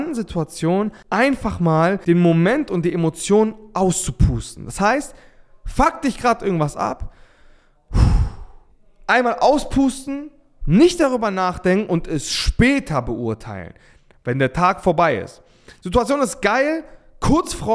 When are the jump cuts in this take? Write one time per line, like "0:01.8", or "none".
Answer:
none